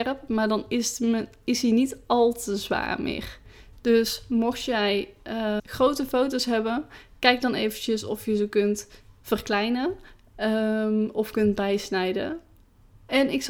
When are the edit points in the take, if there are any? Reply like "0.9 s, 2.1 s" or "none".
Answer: 3.7 s, 5.6 s